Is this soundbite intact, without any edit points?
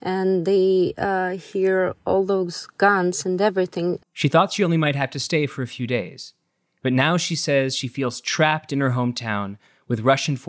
no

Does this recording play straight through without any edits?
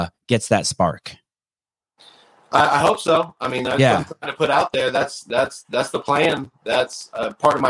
yes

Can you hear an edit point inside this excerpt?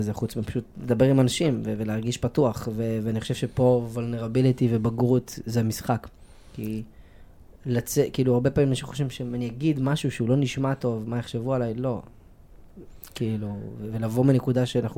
no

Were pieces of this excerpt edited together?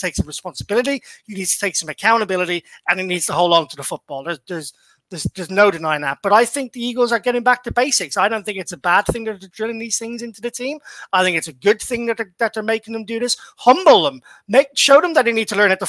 no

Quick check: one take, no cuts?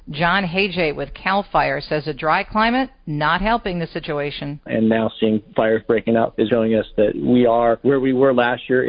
no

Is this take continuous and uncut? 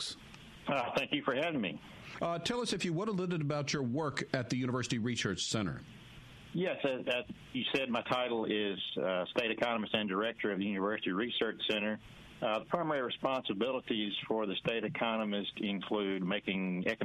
yes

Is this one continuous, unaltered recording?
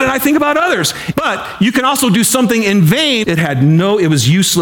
no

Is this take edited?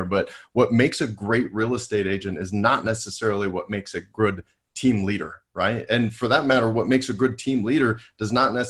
no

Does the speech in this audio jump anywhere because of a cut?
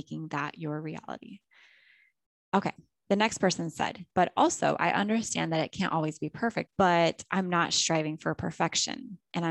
yes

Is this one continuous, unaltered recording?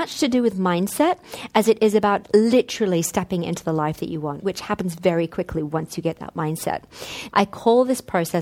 no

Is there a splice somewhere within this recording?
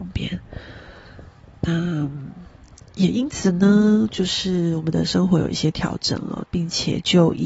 yes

